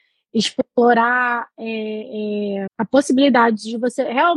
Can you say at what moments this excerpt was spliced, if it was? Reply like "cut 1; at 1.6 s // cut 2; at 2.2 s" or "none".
cut 1; at 2.7 s